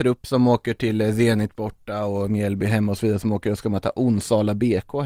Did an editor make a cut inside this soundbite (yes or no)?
no